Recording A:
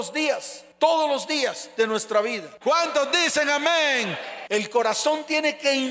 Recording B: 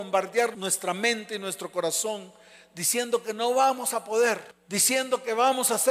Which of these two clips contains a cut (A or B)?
A